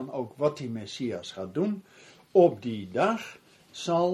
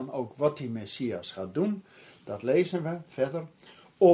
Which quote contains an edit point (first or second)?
first